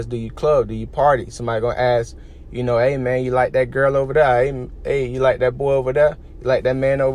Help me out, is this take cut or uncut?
uncut